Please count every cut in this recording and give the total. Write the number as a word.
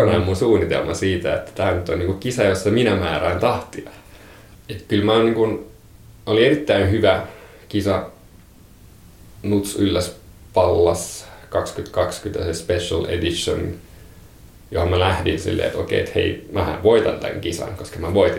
one